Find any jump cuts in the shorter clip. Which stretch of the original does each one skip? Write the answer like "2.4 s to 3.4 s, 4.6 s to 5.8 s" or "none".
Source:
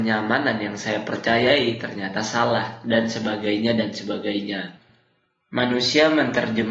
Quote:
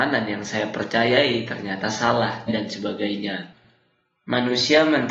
2.8 s to 3.7 s